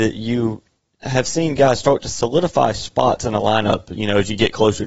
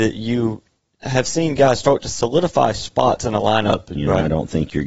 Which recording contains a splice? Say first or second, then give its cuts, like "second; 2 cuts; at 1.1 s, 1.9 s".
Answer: second; 1 cut; at 4.0 s